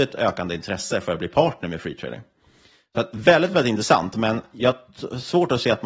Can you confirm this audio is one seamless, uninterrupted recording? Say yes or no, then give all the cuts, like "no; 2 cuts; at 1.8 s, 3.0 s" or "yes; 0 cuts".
yes; 0 cuts